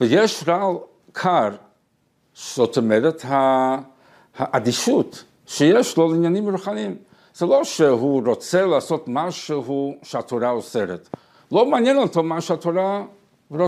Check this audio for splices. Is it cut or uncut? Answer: uncut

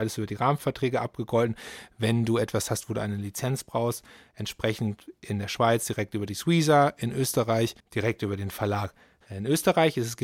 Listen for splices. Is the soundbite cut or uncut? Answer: cut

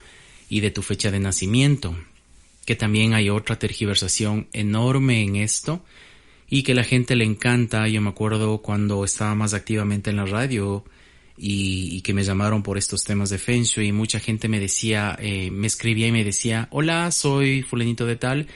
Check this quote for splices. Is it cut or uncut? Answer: uncut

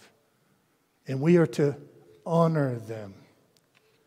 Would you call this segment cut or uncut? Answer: cut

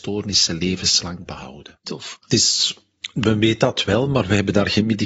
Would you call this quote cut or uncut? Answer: cut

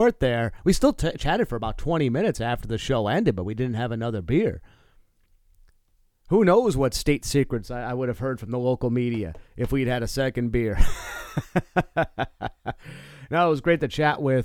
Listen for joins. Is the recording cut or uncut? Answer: uncut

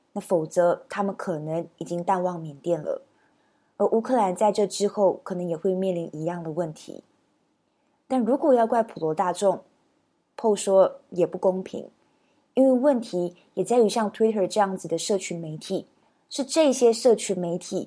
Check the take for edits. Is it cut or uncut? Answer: uncut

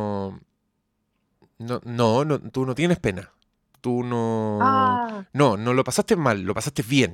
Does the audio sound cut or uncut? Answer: uncut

